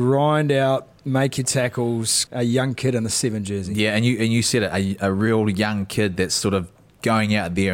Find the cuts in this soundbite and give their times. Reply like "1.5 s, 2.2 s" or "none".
2.3 s